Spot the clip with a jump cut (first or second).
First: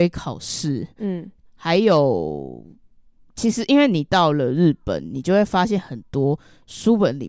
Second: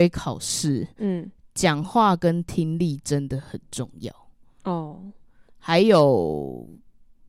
first